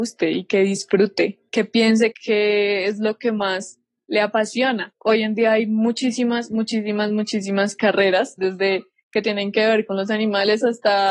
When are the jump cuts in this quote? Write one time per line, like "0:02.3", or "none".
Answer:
0:02.1
0:08.4